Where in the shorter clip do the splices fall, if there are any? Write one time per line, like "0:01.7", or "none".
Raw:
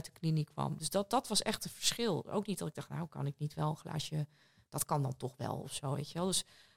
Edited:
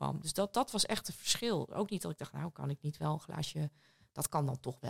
none